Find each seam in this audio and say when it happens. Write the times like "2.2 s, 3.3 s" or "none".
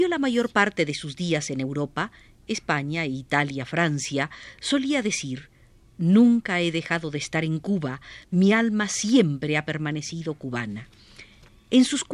none